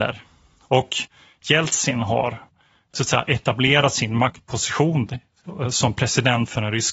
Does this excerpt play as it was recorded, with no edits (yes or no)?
yes